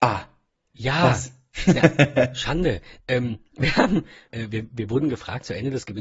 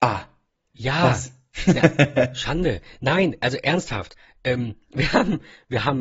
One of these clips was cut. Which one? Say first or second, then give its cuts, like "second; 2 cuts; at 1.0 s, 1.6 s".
first; 2 cuts; at 3.0 s, 4.3 s